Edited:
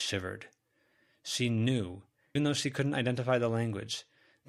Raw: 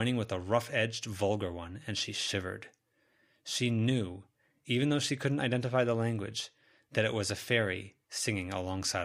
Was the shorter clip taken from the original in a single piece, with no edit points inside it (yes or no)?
no